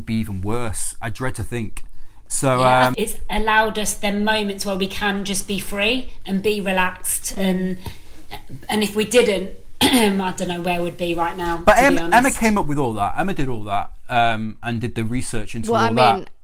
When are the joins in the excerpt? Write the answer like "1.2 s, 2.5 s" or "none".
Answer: 2.9 s